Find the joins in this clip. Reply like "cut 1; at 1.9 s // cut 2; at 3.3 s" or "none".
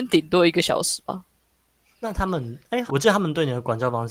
cut 1; at 2.9 s